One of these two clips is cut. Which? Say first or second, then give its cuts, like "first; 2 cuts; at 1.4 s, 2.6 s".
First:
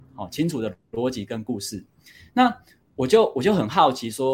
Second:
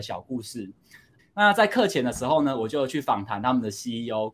second; 1 cut; at 1.2 s